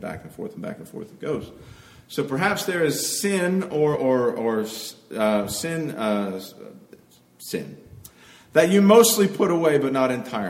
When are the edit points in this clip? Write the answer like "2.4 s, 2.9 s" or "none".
3.9 s

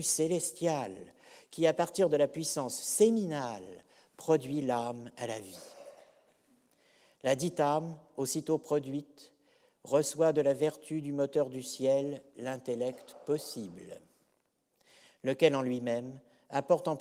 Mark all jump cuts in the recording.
none

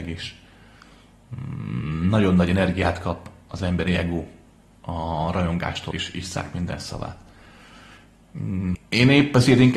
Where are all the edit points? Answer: 5.9 s, 8.7 s

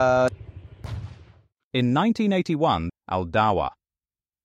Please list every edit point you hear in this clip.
1.6 s, 2.9 s

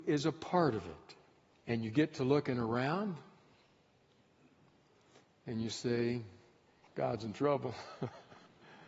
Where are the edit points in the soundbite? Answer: 1.6 s, 6.9 s

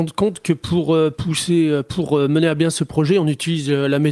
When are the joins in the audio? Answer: none

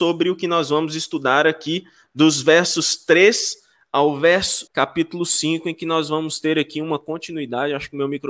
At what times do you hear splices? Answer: 4.7 s

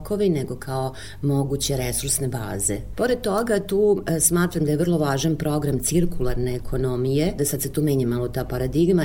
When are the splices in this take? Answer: 2.9 s, 7.4 s

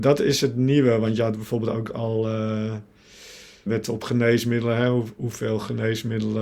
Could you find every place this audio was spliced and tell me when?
3.7 s

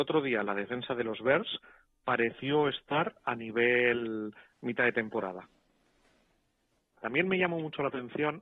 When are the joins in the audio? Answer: 7.0 s

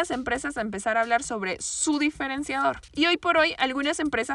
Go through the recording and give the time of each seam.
2.9 s

